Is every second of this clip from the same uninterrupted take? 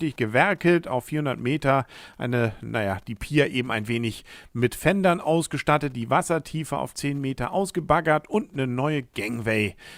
yes; 0 cuts

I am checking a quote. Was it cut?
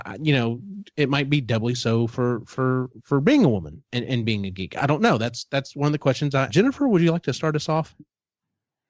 yes; 1 cut; at 6.5 s

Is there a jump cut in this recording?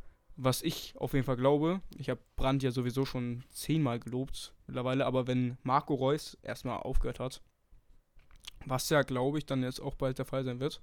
yes; 1 cut; at 4.6 s

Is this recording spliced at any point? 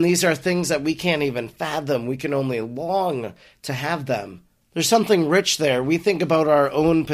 yes; 1 cut; at 4.6 s

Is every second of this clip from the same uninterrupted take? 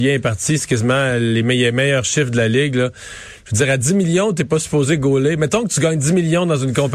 yes; 0 cuts

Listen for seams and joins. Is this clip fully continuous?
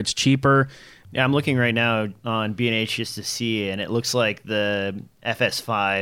no; 1 cut; at 1.0 s

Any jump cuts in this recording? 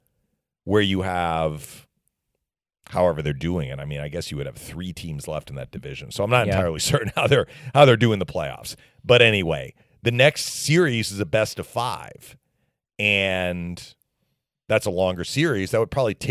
no; 0 cuts

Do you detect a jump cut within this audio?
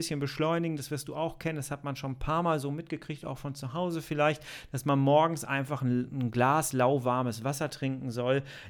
no; 0 cuts

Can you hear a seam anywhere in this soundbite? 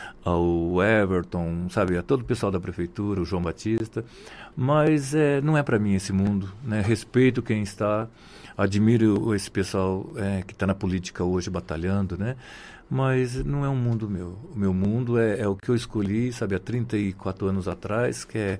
no; 0 cuts

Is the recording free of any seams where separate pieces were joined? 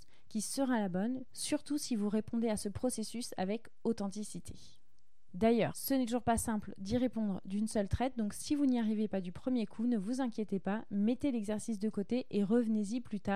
yes; 0 cuts

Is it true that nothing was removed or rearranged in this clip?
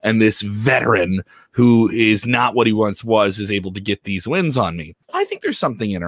no; 1 cut; at 5.0 s

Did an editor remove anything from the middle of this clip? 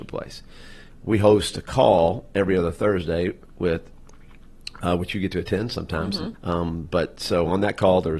yes; 1 cut; at 6.3 s

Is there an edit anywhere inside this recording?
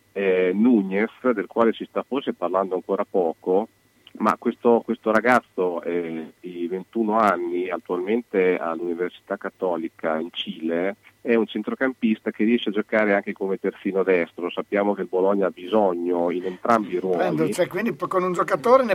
no; 0 cuts

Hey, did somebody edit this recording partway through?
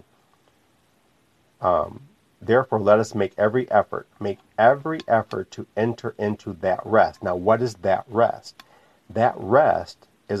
no; 0 cuts

